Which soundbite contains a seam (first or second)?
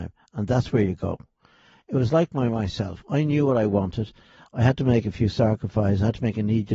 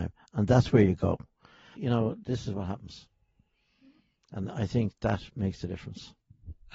second